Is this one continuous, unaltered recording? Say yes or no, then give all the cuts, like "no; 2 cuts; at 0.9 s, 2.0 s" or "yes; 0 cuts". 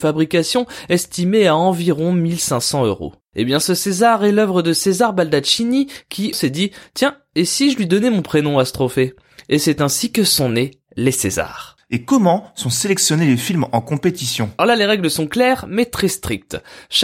no; 2 cuts; at 6.3 s, 14.6 s